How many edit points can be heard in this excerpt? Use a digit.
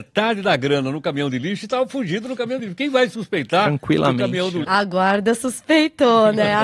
1